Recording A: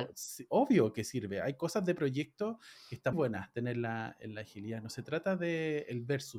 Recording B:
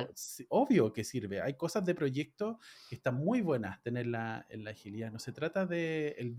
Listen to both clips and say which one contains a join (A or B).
A